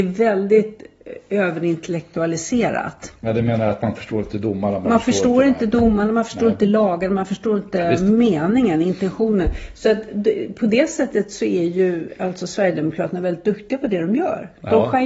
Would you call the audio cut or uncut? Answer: uncut